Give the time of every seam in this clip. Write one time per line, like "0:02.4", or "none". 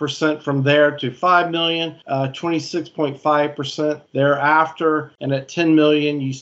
0:04.1